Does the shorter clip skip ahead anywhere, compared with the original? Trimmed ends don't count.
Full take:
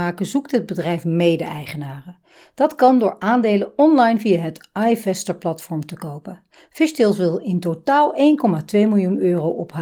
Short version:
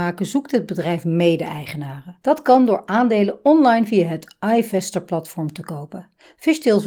yes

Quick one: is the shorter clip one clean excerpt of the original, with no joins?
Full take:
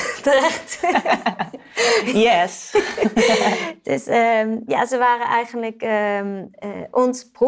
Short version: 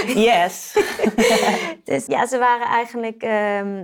no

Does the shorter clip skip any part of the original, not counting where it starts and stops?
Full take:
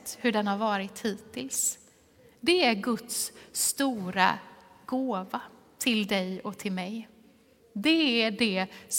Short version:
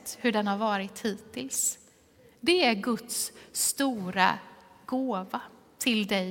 no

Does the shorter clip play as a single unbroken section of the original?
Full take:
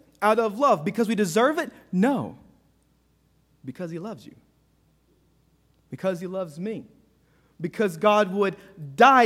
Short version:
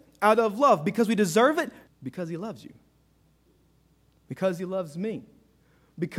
no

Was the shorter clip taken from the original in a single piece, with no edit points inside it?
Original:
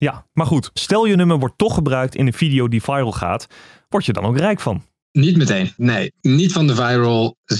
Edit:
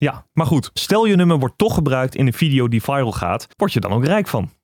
no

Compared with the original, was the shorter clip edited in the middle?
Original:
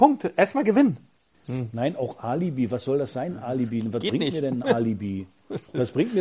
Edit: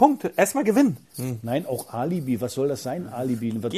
yes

